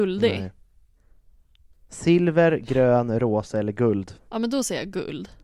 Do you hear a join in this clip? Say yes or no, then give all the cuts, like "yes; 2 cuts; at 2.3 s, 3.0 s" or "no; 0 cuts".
no; 0 cuts